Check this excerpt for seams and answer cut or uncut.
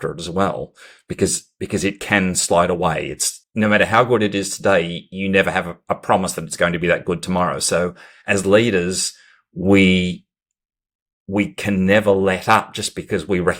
uncut